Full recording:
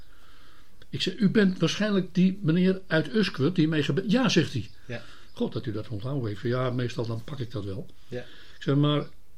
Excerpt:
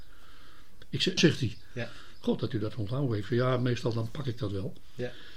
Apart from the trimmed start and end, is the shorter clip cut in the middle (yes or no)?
yes